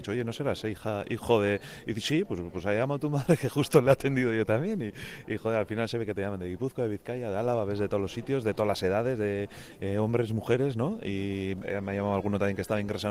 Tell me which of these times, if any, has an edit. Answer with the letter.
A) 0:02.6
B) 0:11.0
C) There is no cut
C